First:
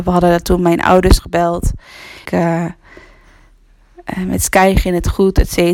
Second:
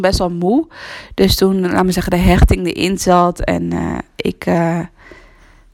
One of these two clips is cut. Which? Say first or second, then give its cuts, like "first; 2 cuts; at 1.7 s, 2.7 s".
first; 1 cut; at 2.3 s